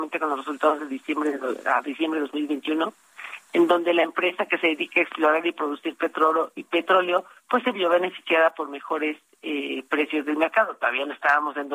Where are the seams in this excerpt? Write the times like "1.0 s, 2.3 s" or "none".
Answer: none